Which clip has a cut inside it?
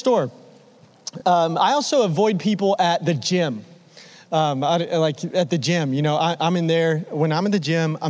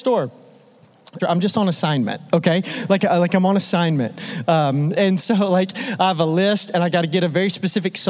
second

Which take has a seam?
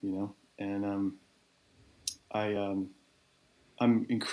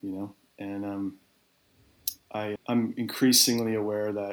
second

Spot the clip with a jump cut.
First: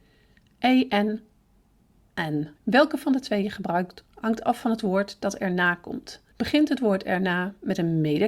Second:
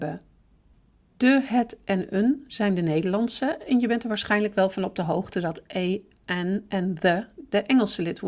first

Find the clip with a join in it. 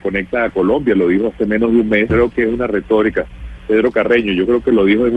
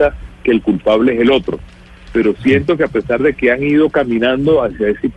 first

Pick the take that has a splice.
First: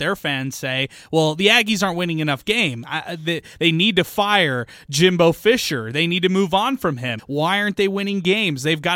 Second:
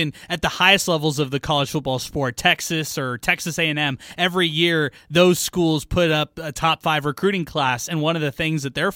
first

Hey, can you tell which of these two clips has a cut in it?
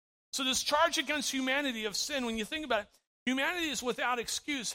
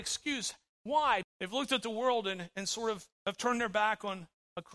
second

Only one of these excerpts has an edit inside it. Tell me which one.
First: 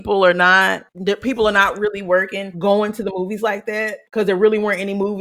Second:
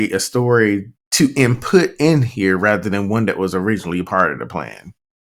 first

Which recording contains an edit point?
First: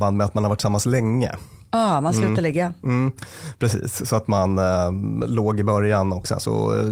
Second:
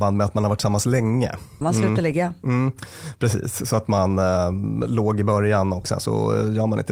second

